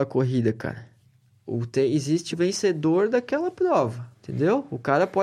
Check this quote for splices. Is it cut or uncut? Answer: cut